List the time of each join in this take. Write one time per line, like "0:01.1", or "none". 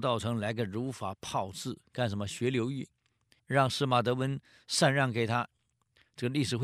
0:03.4

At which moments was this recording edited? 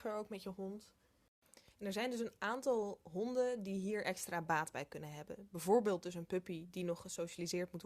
none

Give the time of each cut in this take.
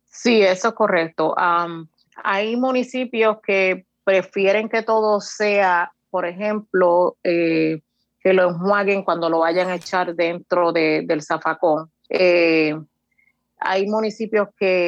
0:12.1

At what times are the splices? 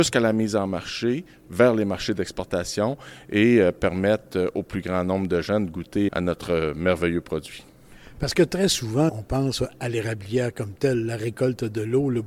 0:06.1
0:09.1

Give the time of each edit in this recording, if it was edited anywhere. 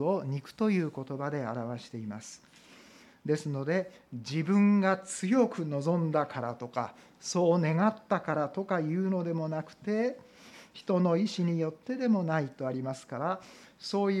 none

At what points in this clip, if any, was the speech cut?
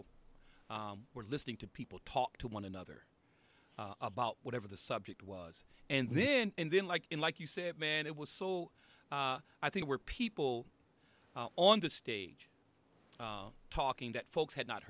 none

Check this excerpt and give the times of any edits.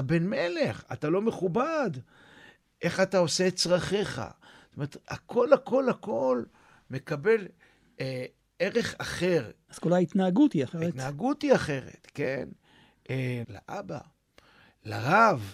0:09.7
0:13.4

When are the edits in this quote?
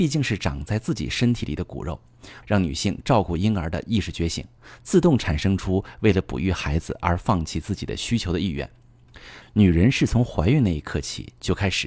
0:02.4
0:09.4

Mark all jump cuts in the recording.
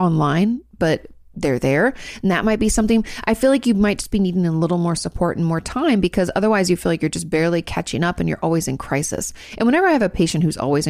none

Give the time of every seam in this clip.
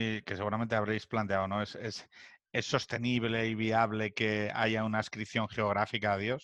none

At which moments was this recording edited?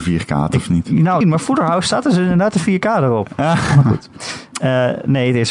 0:01.2

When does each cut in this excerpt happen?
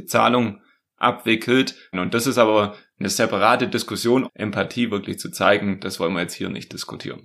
0:01.9
0:04.3

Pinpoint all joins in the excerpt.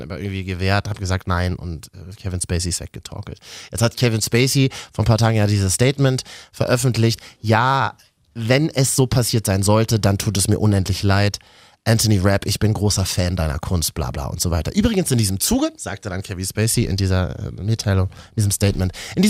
0:14.1

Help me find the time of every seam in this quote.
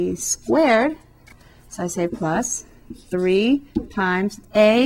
none

